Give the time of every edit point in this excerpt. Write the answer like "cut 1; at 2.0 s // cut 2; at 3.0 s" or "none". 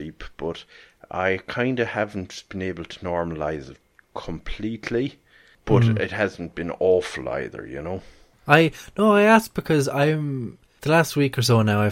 none